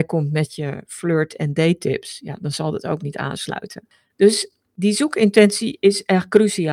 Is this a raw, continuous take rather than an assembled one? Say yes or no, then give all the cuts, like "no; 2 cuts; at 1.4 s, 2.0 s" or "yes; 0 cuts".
yes; 0 cuts